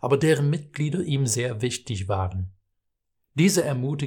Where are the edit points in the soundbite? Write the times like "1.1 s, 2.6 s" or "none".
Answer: 3.1 s